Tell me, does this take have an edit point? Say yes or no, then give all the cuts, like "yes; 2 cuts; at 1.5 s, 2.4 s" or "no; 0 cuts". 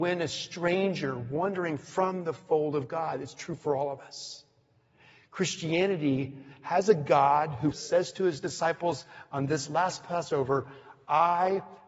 yes; 1 cut; at 7.7 s